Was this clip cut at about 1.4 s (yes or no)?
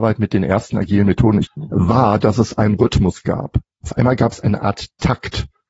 yes